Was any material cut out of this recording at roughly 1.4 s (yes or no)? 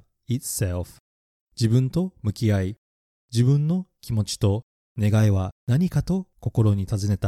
yes